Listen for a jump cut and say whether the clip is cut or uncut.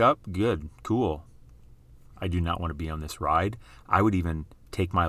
cut